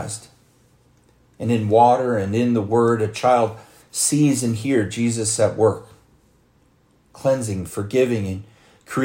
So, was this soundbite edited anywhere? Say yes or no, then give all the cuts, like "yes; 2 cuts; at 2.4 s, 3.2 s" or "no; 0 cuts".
no; 0 cuts